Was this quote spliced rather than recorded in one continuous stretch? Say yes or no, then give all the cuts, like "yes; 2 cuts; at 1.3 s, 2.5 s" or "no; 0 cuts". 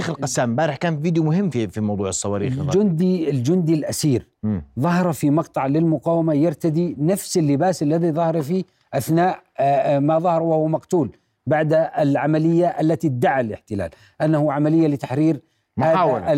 no; 0 cuts